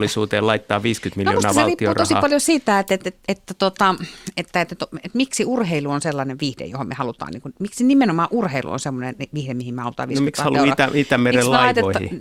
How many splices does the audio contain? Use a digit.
0